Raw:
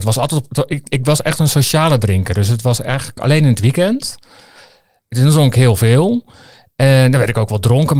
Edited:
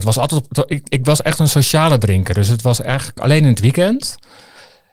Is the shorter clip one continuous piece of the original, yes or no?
yes